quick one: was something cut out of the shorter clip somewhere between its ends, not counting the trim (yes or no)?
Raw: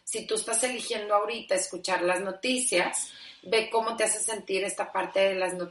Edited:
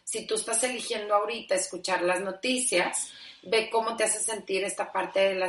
no